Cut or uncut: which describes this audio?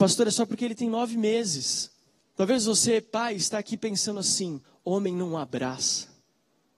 cut